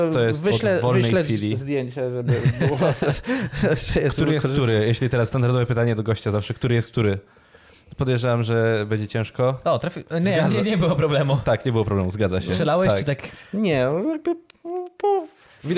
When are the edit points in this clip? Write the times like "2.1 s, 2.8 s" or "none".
none